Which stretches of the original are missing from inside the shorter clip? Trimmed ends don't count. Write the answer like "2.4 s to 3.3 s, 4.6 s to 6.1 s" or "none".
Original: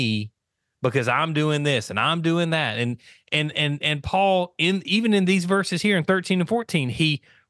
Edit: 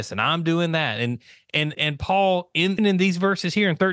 3.5 s to 3.8 s, 4.8 s to 5.1 s